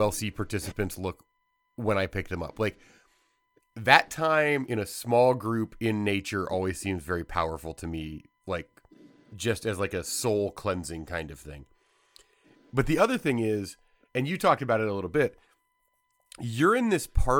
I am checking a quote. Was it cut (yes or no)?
no